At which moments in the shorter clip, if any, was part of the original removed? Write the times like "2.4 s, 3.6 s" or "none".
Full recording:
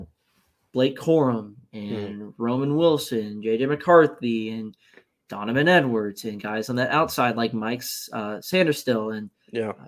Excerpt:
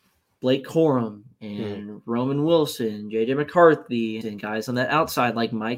4.2 s